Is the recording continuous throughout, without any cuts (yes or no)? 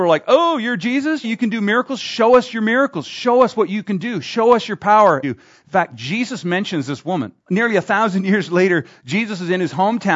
no